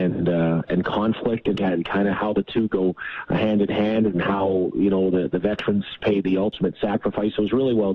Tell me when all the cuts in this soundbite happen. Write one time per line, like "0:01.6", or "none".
0:01.5